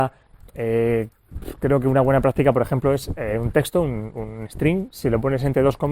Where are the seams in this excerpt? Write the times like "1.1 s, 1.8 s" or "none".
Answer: none